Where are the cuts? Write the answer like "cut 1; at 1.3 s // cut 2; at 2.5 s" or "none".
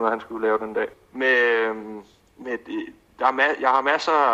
cut 1; at 0.9 s